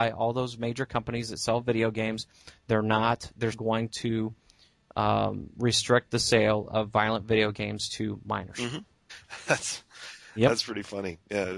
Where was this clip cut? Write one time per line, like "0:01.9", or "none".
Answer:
0:03.5
0:09.1